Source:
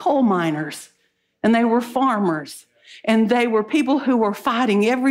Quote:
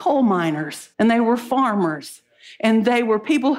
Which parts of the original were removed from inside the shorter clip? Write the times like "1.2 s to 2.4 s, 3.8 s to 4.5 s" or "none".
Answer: 0.9 s to 1.4 s